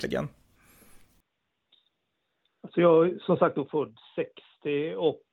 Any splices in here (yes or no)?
no